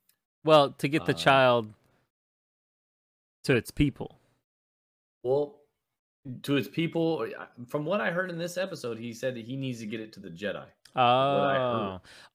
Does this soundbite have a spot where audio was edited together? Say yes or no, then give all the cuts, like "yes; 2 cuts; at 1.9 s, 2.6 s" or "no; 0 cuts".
no; 0 cuts